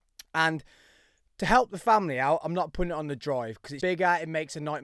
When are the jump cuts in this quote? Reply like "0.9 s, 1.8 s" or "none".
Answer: 3.8 s